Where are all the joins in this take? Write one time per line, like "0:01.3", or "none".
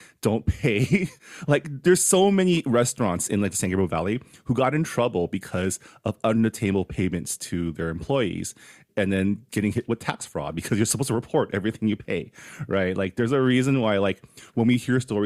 none